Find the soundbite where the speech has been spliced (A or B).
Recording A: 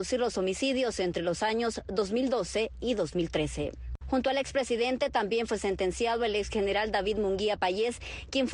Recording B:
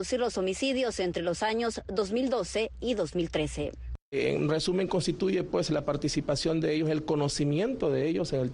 A